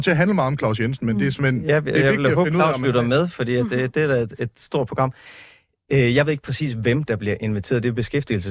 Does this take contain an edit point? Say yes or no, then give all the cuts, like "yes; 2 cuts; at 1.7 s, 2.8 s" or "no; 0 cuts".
no; 0 cuts